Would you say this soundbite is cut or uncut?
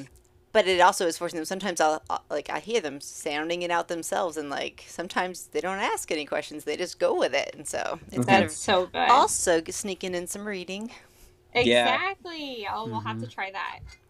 uncut